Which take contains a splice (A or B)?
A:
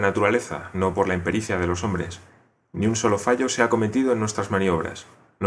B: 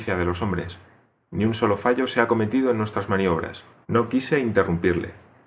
B